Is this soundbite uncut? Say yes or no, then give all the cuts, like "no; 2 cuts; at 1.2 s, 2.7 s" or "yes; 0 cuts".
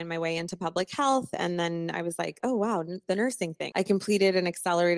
no; 2 cuts; at 2.4 s, 3.7 s